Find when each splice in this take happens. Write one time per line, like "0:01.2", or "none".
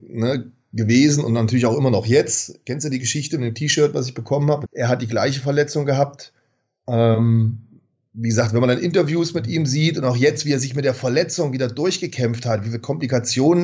0:04.6